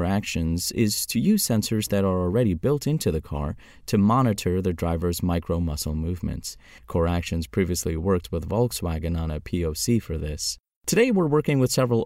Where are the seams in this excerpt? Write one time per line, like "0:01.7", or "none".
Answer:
0:06.8